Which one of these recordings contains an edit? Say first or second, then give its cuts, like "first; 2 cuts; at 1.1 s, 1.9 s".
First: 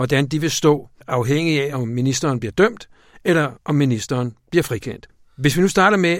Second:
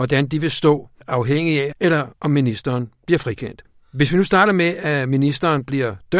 second; 1 cut; at 1.7 s